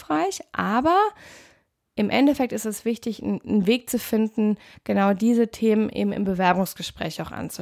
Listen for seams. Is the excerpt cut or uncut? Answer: uncut